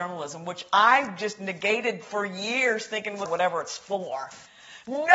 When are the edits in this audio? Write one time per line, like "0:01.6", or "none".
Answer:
0:03.2